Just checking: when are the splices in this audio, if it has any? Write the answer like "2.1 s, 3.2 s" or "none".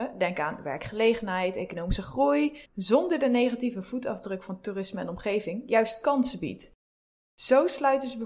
2.7 s